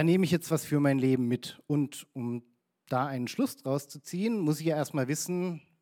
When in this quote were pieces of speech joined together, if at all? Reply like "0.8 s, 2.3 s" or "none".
none